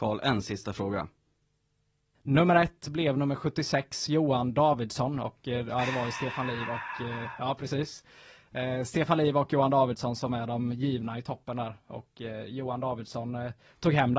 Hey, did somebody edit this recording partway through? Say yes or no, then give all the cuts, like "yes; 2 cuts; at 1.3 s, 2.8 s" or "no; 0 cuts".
yes; 1 cut; at 2.2 s